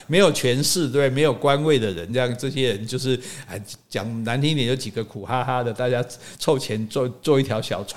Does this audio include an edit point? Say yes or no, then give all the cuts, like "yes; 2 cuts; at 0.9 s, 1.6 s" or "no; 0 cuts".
no; 0 cuts